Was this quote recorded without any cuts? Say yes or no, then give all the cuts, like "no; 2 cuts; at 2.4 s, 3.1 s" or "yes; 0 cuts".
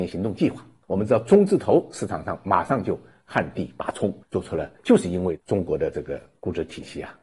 no; 1 cut; at 4.8 s